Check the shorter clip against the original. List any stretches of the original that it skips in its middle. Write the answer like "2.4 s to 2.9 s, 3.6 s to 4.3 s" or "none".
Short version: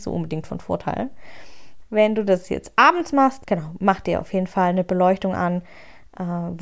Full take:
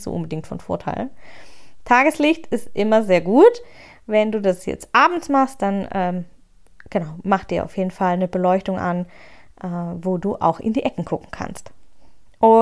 1.8 s to 4.0 s, 5.6 s to 6.8 s

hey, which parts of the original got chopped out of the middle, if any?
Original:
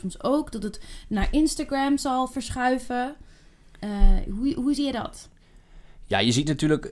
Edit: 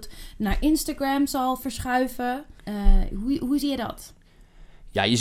3.3 s to 3.7 s

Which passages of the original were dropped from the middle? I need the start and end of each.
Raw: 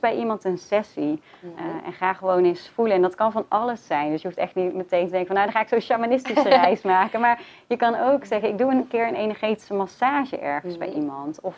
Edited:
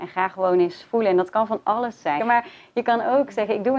4.0 s to 7.1 s

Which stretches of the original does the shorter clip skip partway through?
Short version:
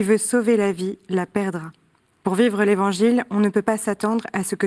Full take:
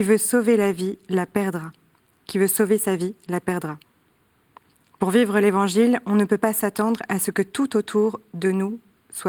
2.2 s to 5.0 s

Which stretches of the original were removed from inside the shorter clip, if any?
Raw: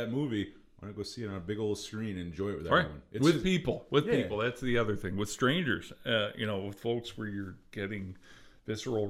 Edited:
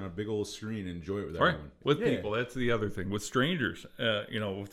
3.1 s to 3.9 s

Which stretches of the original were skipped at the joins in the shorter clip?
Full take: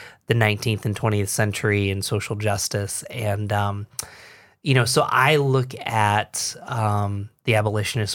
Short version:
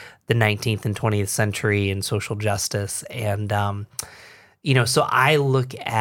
none

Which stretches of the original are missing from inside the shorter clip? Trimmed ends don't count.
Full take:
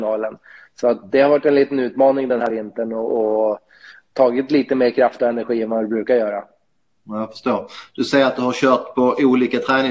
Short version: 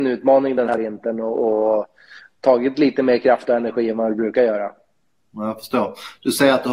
none

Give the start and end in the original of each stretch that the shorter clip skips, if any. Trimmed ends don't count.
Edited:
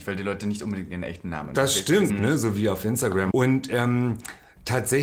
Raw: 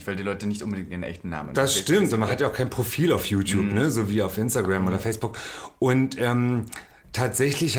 2.1 s to 3.6 s, 4.8 s to 5.8 s

